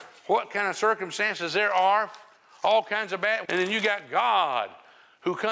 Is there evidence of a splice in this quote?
yes; 1 cut; at 3.4 s

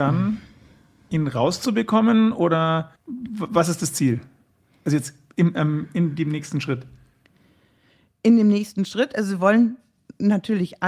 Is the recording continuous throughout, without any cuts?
no; 1 cut; at 3.0 s

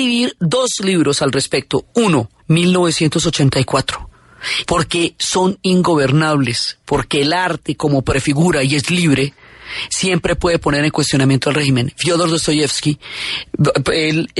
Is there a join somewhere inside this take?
yes; 2 cuts; at 2.4 s, 4.6 s

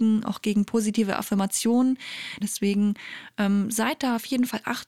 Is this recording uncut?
no; 1 cut; at 2.4 s

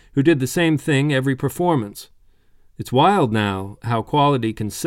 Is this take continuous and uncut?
yes; 0 cuts

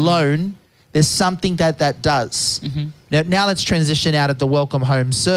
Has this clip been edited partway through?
yes; 1 cut; at 3.0 s

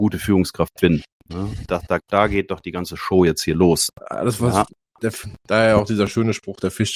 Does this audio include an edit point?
yes; 2 cuts; at 2.0 s, 3.9 s

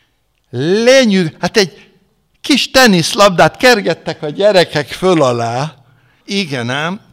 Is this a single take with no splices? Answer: no; 1 cut; at 6.2 s

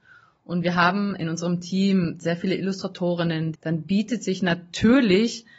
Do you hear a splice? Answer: yes; 1 cut; at 3.5 s

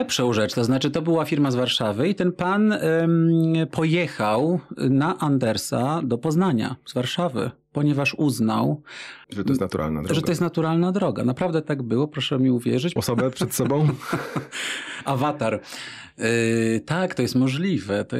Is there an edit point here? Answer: yes; 2 cuts; at 9.2 s, 13.0 s

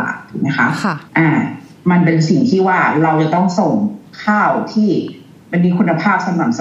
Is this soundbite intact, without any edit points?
no; 1 cut; at 1.1 s

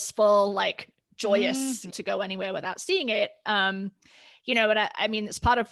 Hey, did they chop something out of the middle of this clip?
yes; 1 cut; at 1.9 s

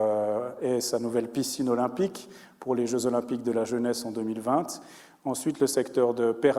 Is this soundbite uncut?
yes; 0 cuts

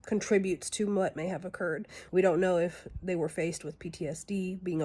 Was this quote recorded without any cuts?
no; 1 cut; at 2.1 s

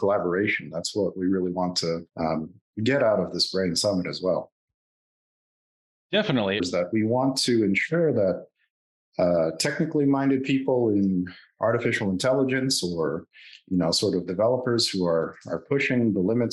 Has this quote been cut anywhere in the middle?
yes; 2 cuts; at 2.1 s, 6.6 s

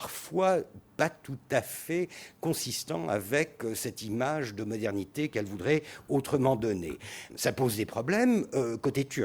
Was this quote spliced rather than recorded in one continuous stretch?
yes; 1 cut; at 7.3 s

